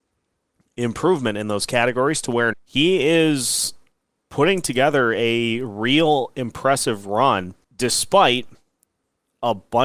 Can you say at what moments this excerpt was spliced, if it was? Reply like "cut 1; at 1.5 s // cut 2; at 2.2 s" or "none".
cut 1; at 2.5 s // cut 2; at 7.6 s